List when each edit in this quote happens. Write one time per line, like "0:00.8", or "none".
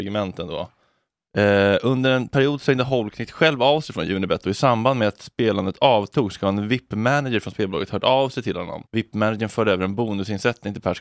0:01.3
0:08.9